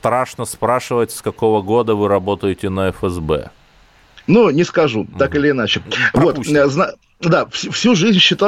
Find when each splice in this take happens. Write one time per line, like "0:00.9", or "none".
none

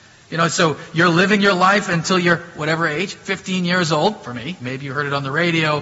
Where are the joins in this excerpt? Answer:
0:04.6

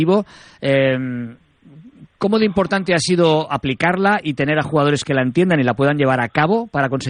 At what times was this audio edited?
none

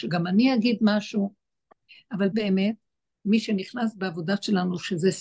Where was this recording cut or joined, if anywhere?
0:02.3

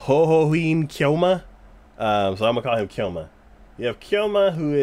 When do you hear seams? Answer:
0:01.9

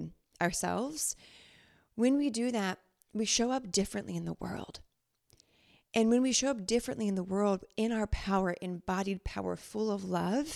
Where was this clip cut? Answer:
none

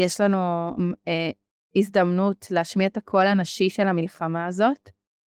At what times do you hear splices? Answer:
none

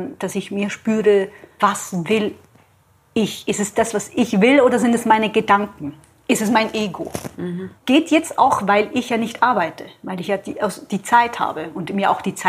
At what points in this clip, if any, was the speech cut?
0:07.8

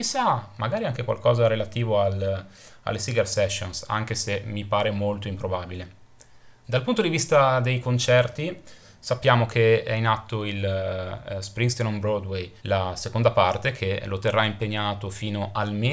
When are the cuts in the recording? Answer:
0:06.6
0:12.6

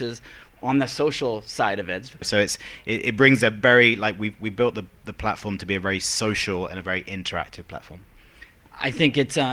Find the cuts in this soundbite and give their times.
0:02.2

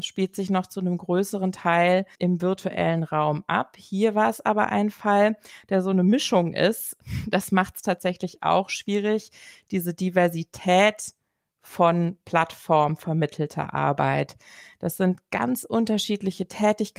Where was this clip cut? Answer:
none

